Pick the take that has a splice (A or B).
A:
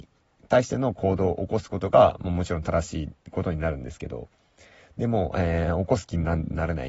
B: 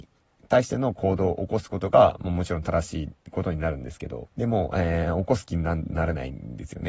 B